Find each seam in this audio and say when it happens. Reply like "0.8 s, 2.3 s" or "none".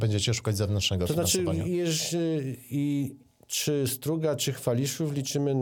none